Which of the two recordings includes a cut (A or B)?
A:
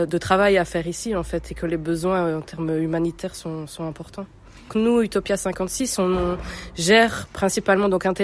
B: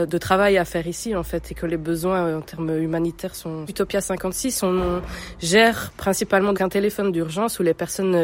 B